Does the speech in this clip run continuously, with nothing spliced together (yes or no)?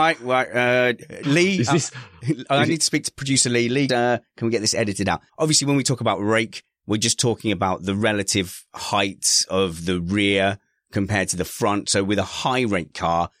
no